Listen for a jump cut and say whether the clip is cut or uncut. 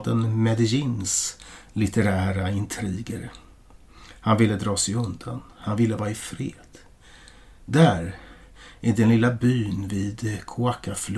uncut